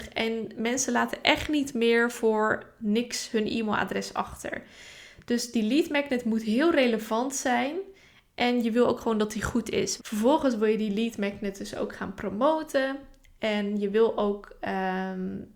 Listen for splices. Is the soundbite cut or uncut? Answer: cut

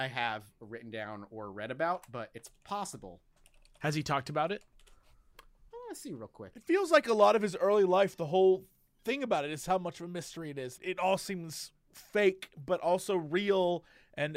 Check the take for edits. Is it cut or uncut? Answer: cut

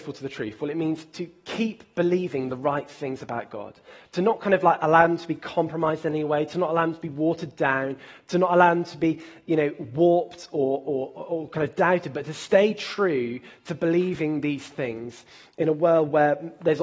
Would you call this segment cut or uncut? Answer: uncut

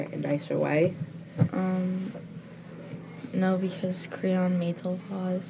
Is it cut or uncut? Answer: cut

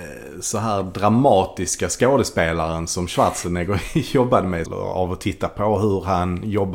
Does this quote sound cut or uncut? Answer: cut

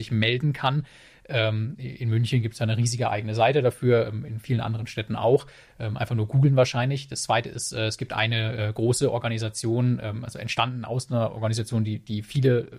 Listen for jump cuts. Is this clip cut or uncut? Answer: uncut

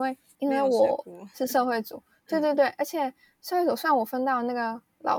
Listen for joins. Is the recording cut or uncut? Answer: uncut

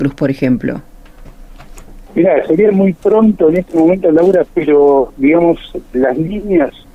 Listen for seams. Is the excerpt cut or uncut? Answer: cut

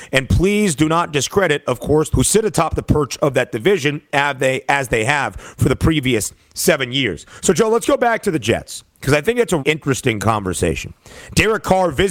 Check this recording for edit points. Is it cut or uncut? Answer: cut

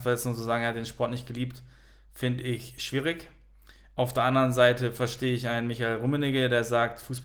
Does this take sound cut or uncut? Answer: uncut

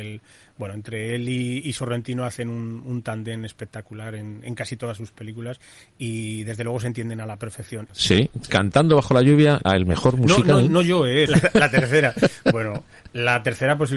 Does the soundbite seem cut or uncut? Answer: cut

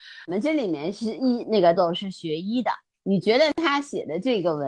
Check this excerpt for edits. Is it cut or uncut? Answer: cut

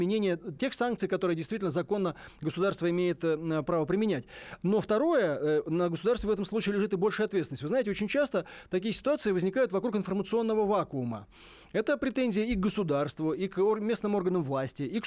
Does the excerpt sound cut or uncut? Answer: uncut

